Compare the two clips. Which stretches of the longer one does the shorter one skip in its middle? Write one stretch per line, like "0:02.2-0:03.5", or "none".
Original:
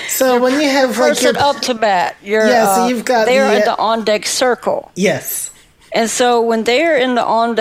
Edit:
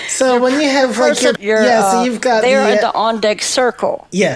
0:01.4-0:02.2